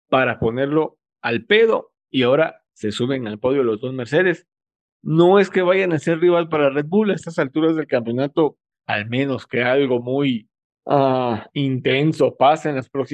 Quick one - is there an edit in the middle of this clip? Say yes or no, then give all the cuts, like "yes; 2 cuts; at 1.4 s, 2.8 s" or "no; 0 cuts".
yes; 1 cut; at 8.7 s